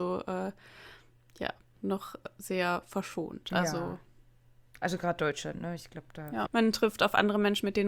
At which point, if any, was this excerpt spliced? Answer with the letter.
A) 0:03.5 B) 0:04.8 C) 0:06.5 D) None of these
C